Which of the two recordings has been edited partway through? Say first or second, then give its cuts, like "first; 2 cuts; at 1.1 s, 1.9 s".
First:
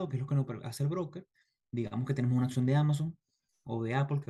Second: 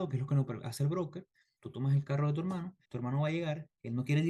second; 2 cuts; at 1.6 s, 2.8 s